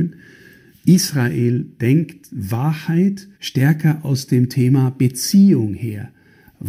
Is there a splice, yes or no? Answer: yes